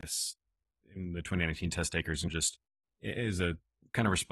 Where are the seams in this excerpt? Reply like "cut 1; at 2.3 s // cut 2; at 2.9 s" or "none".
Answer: none